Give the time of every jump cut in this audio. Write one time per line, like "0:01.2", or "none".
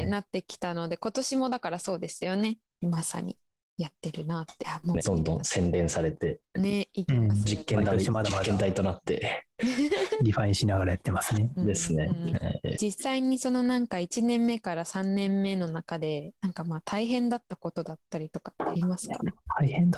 0:02.7
0:05.0